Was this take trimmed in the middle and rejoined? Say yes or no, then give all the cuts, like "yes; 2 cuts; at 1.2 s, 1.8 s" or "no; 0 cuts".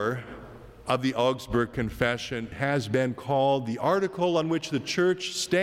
yes; 1 cut; at 2.5 s